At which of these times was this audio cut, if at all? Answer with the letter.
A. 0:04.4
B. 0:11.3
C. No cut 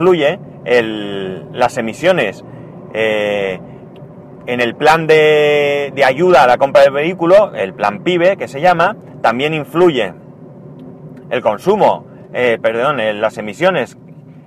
B